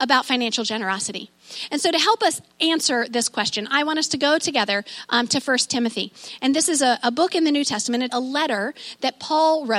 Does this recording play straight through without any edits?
no; 1 cut; at 8.1 s

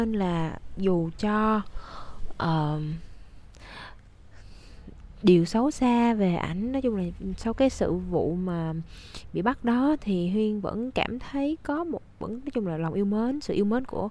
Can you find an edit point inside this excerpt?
yes; 1 cut; at 5.2 s

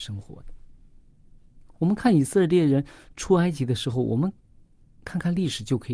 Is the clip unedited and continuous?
yes; 0 cuts

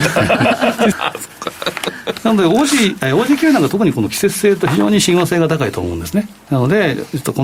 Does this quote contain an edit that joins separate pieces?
yes; 1 cut; at 0.9 s

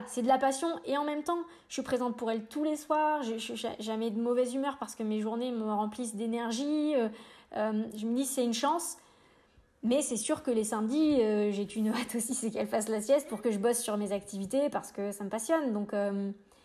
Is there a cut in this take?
no; 0 cuts

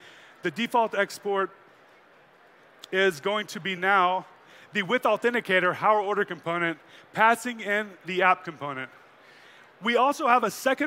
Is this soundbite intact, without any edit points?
yes; 0 cuts

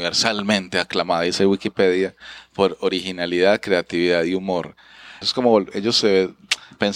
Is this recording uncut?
no; 1 cut; at 5.2 s

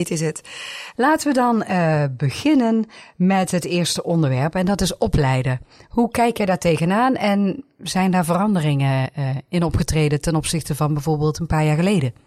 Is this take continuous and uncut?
no; 1 cut; at 0.9 s

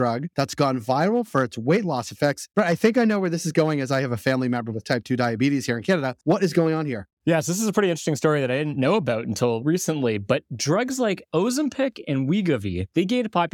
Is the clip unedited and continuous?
yes; 0 cuts

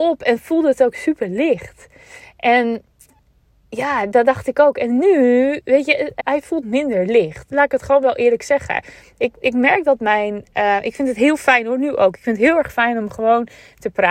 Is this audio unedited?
no; 1 cut; at 6.2 s

